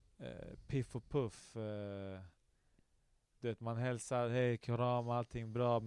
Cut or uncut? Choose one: uncut